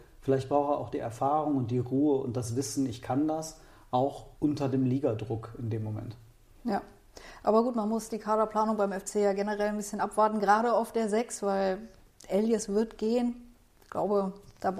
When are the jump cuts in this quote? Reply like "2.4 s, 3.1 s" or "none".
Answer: 4.3 s